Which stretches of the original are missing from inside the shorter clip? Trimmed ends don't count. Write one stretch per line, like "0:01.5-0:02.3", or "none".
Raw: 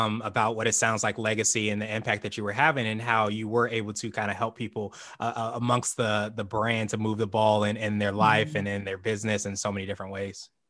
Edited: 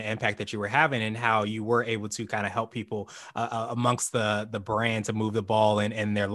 none